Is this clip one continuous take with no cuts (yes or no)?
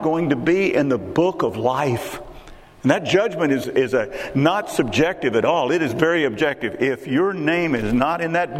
no